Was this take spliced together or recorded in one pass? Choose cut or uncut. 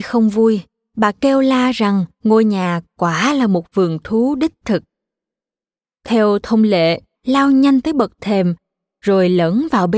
cut